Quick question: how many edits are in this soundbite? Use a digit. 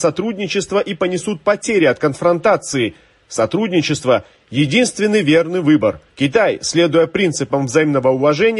1